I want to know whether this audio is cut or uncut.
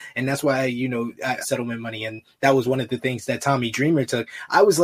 cut